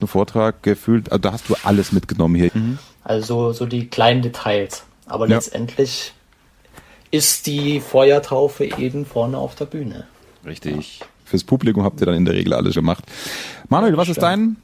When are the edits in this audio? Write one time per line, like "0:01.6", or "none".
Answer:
0:02.5
0:11.2
0:12.8

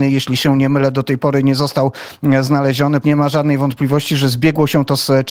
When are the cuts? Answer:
0:03.0

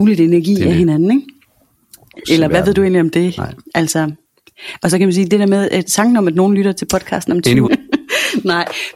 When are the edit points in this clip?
0:02.2
0:07.6

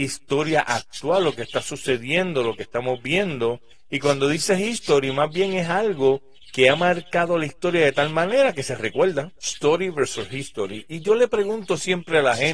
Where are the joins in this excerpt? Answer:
none

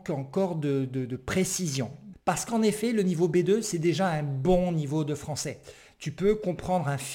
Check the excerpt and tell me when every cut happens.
0:02.1
0:05.9

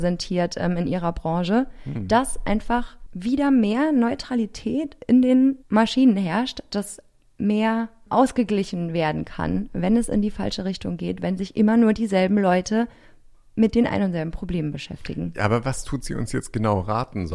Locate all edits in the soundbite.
0:05.6

